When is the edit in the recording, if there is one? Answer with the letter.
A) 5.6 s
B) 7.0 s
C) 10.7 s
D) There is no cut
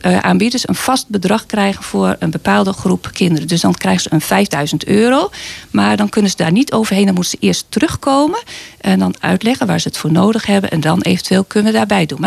D